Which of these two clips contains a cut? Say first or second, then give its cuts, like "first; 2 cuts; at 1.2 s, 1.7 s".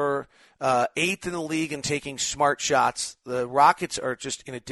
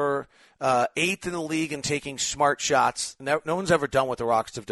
second; 1 cut; at 3.2 s